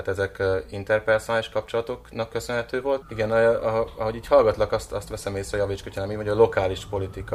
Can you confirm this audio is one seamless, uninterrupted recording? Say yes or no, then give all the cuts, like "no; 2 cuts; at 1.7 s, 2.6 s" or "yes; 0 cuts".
no; 1 cut; at 3.0 s